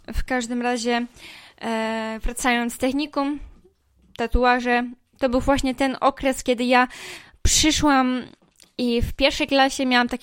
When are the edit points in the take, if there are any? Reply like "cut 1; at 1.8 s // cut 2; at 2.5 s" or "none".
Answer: none